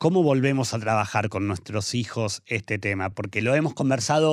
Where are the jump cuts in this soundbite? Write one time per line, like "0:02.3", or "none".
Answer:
none